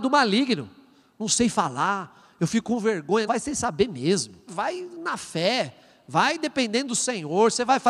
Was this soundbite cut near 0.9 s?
no; 2 cuts; at 3.3 s, 4.5 s

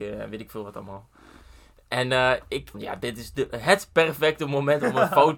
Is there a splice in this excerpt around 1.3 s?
no; 1 cut; at 2.7 s

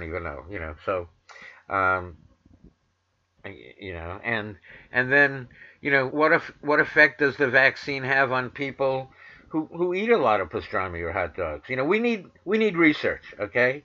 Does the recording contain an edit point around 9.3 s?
no; 2 cuts; at 3.4 s, 6.1 s

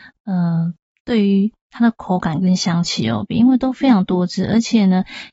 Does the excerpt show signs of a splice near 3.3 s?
yes; 1 cut; at 3.3 s

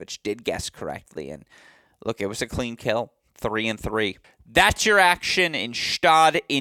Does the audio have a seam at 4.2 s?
yes; 1 cut; at 4.2 s

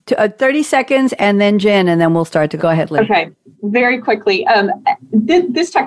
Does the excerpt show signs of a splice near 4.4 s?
no; 1 cut; at 2.6 s

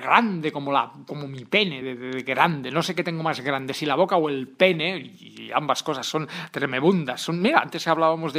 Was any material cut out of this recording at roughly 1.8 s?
yes; 1 cut; at 1.8 s

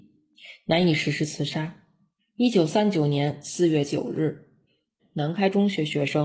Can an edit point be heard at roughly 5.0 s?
yes; 2 cuts; at 2.2 s, 5.0 s

